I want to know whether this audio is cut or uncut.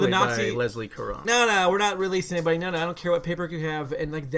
cut